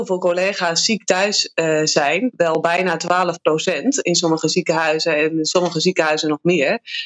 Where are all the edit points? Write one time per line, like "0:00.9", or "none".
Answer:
0:02.3